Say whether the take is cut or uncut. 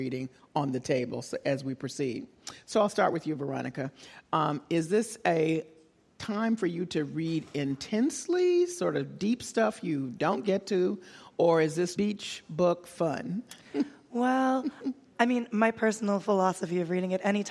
cut